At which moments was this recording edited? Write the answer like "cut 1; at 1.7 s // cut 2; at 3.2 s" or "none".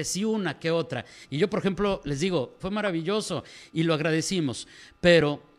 cut 1; at 1.2 s // cut 2; at 2.6 s